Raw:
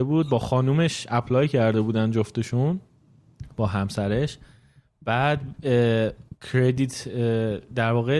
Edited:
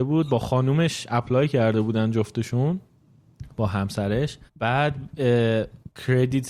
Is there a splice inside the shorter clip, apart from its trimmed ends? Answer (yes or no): yes